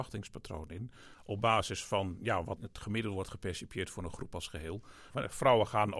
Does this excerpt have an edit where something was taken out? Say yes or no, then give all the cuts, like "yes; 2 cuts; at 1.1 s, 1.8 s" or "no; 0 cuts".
yes; 2 cuts; at 2.6 s, 5.1 s